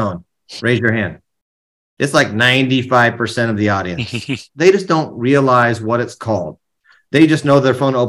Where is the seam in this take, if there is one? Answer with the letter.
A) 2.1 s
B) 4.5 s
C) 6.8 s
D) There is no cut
B